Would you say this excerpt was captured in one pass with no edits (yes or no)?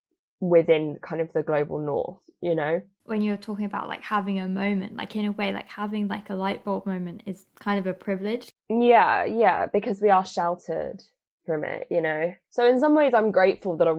no